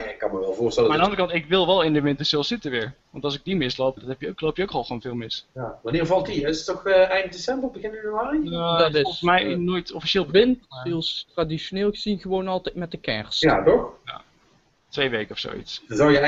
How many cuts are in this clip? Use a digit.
1